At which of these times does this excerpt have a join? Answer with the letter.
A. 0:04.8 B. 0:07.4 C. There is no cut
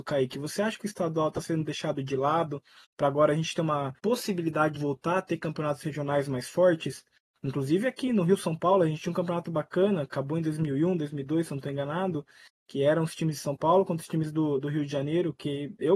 A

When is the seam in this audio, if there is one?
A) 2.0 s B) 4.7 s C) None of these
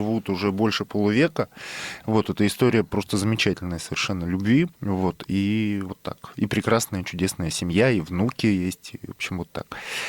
B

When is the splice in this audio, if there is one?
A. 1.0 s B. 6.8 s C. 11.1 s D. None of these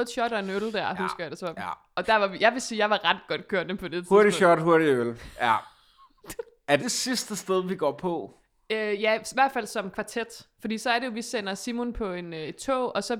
B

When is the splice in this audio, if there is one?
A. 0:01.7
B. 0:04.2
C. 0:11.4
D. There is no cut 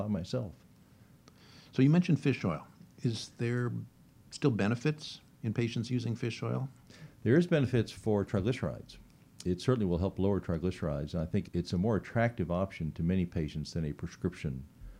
C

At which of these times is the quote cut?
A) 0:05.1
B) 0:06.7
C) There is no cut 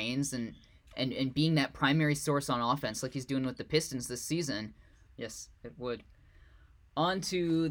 A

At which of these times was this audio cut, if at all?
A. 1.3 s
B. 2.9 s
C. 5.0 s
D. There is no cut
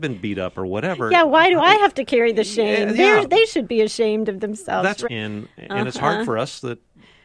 C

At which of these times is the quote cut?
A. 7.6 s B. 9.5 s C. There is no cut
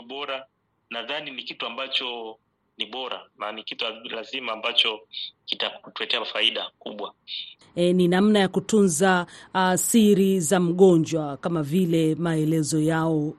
A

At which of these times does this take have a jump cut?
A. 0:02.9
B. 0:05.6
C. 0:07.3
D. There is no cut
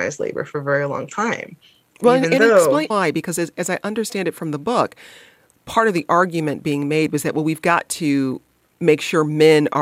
A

